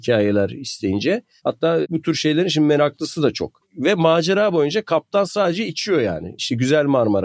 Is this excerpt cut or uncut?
cut